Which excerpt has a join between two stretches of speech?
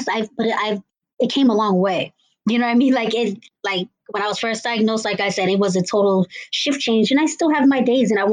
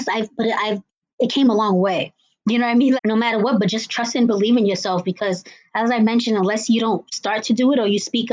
second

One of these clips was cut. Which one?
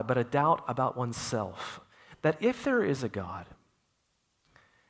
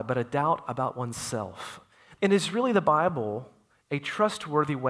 second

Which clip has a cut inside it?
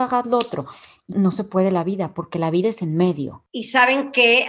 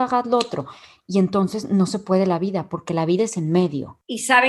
first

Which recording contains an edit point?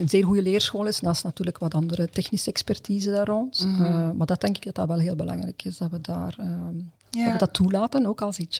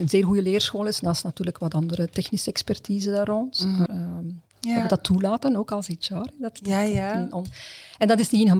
second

